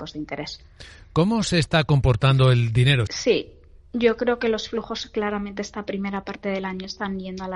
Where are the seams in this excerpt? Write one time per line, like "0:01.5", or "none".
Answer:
0:03.1